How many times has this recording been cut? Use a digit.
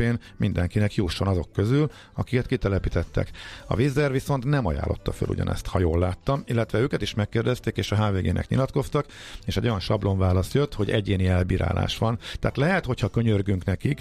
0